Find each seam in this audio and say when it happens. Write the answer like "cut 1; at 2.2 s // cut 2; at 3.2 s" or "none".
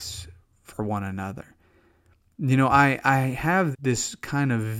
cut 1; at 2.3 s // cut 2; at 3.7 s